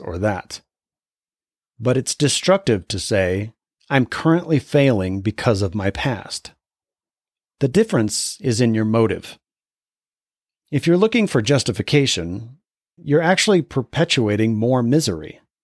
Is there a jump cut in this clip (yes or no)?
yes